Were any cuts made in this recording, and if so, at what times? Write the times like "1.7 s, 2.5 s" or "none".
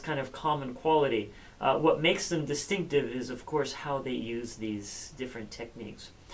none